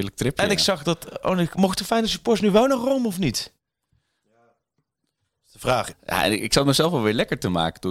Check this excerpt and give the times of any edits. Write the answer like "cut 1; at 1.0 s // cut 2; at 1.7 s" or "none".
cut 1; at 5.9 s